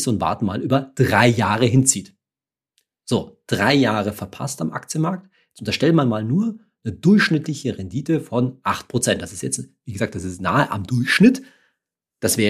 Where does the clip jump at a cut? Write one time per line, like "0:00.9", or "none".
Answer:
none